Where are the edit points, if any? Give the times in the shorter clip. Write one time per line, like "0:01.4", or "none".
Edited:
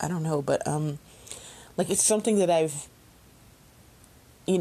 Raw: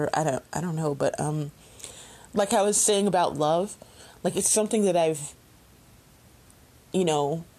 0:01.7